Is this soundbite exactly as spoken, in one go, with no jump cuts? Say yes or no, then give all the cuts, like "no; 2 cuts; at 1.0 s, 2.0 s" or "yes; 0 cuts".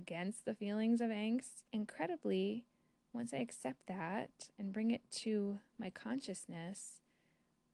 no; 1 cut; at 1.7 s